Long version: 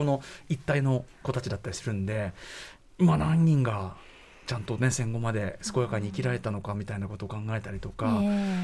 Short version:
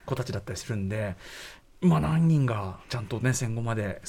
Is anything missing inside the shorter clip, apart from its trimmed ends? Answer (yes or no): yes